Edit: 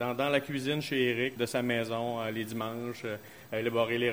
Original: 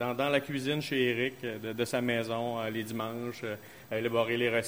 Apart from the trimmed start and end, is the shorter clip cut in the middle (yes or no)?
yes